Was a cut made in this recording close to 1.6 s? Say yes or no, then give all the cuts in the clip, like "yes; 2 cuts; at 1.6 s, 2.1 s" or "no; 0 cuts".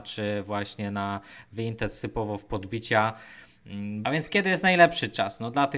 no; 1 cut; at 4.0 s